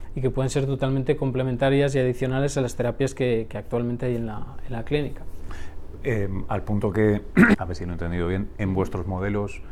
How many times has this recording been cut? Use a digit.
1